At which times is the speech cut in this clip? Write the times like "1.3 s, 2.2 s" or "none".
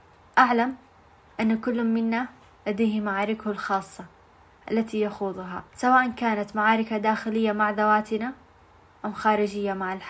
5.7 s